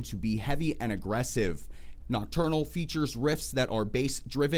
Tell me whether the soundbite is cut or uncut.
cut